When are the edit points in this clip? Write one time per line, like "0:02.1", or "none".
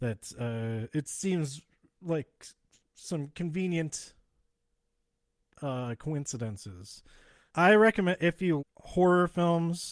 0:07.5
0:08.6